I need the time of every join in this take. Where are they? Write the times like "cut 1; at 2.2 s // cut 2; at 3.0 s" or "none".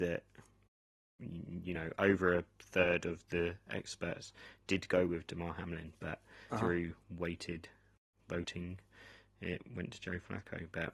cut 1; at 6.5 s

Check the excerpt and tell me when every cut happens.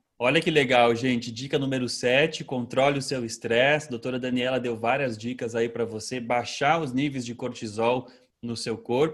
none

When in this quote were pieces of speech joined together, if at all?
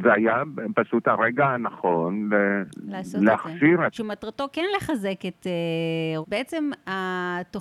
cut 1; at 3.9 s // cut 2; at 6.2 s

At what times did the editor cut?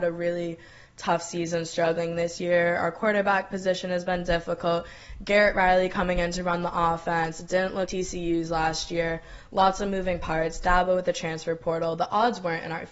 cut 1; at 7.9 s

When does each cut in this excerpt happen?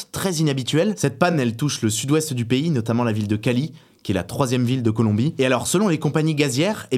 none

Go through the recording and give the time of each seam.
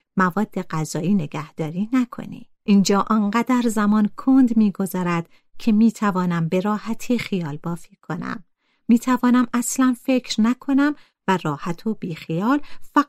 cut 1; at 2.7 s

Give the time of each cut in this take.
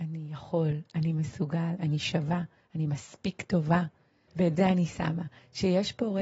cut 1; at 1.8 s // cut 2; at 4.3 s

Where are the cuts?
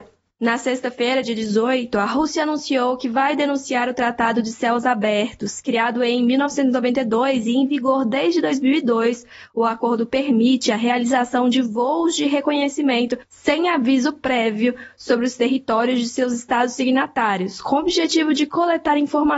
none

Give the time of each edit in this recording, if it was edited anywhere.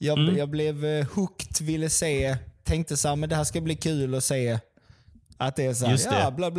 cut 1; at 5.4 s

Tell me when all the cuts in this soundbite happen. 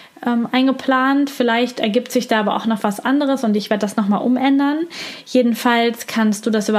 none

